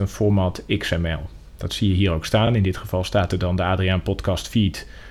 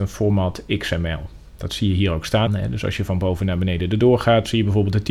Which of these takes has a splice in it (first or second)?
second